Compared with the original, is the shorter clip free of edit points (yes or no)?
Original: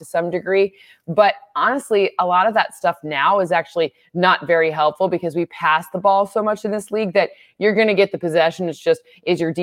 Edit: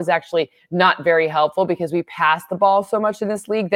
yes